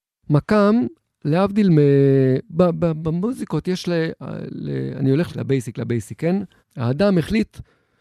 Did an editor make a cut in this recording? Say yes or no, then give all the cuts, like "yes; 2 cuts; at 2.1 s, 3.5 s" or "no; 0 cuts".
yes; 2 cuts; at 5.3 s, 6.6 s